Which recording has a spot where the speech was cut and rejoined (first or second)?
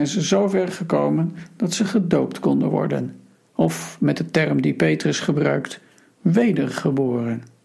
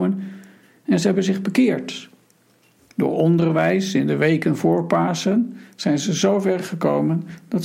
first